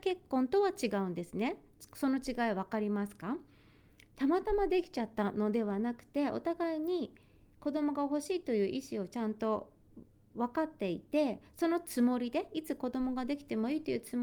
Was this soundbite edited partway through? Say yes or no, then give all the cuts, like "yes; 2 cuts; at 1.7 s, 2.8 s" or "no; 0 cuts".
no; 0 cuts